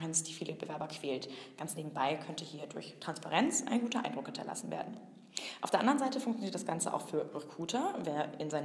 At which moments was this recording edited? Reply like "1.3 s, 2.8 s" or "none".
none

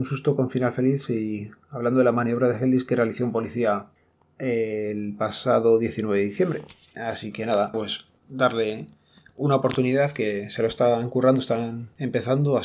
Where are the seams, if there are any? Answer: 7.7 s

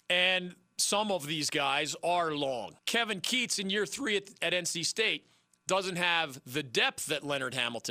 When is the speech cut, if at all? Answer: 2.8 s

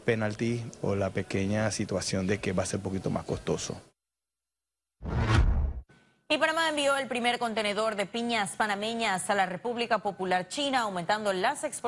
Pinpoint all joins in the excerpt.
none

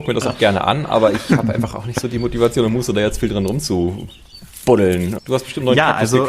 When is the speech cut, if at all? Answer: 5.2 s

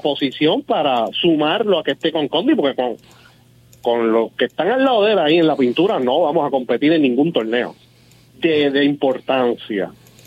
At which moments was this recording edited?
none

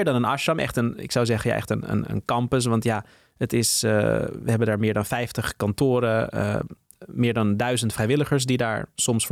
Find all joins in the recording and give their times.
none

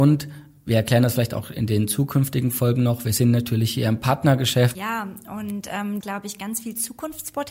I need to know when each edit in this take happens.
4.7 s, 6.0 s

